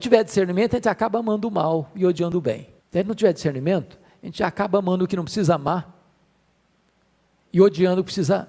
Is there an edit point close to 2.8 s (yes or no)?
yes